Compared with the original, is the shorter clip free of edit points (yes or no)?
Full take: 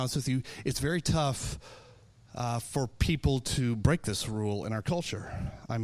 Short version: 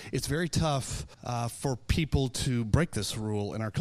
no